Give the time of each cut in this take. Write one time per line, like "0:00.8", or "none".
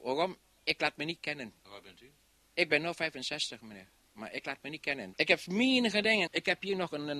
0:01.6
0:05.1
0:06.3